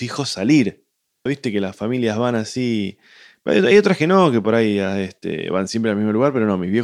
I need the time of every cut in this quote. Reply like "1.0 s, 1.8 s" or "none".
1.3 s